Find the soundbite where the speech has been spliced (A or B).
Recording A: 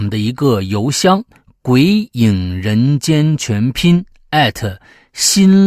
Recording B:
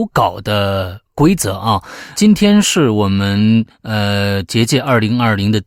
B